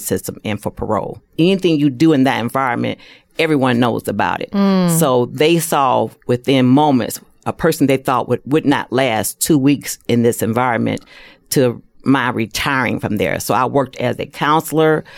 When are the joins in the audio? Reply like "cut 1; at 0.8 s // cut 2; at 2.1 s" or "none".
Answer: cut 1; at 1.3 s